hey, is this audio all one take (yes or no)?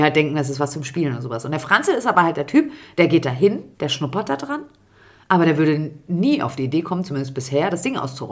yes